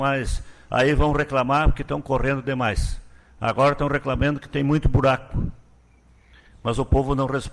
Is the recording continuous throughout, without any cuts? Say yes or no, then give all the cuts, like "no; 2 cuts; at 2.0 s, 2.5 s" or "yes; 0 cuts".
yes; 0 cuts